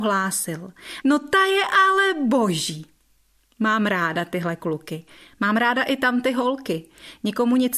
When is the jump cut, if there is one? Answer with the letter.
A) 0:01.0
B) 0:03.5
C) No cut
A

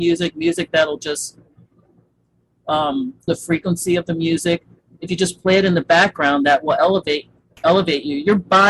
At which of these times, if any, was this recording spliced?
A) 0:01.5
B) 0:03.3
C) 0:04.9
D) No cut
B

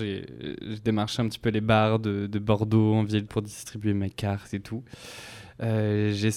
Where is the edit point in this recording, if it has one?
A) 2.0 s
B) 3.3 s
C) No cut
B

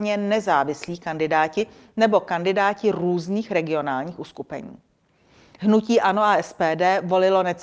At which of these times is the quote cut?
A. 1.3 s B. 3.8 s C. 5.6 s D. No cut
C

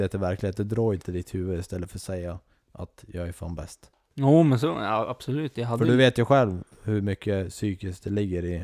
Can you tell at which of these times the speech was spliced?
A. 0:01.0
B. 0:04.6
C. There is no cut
A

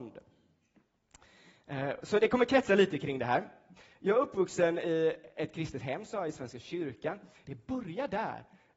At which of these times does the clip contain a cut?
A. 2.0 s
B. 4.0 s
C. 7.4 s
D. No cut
C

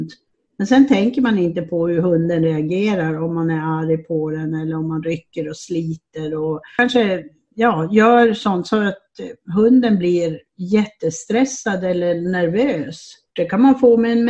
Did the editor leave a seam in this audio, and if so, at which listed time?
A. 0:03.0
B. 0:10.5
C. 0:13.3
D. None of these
C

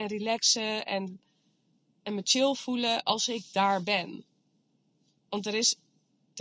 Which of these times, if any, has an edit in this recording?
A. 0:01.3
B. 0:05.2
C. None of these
B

